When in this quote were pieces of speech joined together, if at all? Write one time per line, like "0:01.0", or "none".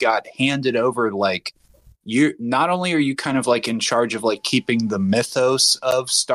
none